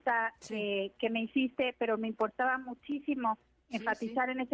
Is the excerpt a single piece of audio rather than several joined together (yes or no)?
yes